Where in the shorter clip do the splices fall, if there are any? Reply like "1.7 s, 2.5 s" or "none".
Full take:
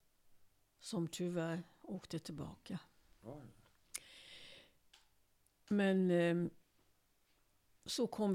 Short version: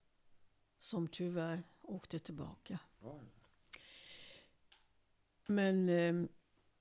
2.9 s